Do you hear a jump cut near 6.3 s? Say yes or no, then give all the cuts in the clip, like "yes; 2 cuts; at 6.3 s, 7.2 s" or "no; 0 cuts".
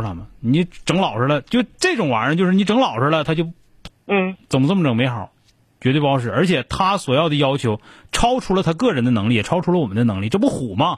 no; 1 cut; at 3.9 s